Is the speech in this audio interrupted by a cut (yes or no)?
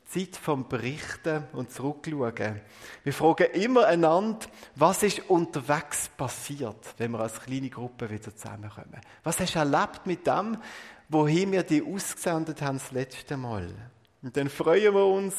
no